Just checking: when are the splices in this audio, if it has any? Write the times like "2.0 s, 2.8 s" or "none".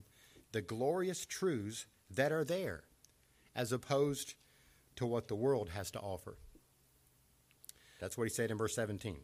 8.0 s